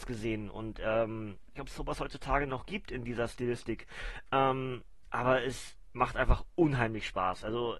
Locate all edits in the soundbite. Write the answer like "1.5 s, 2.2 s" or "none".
1.6 s